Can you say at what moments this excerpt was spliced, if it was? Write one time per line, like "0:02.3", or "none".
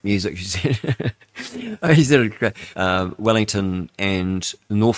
0:01.3
0:02.7
0:03.9